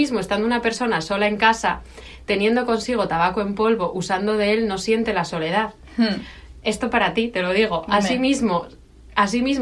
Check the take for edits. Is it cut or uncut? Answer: uncut